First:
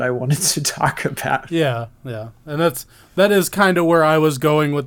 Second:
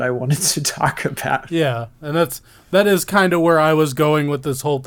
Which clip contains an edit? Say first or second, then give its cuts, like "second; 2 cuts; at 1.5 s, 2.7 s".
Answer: second; 1 cut; at 1.9 s